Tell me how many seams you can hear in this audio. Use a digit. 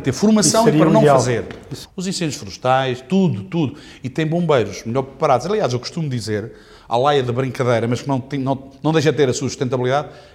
1